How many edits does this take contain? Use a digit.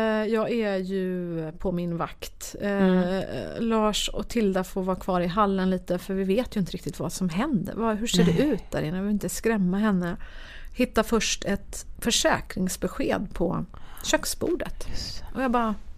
0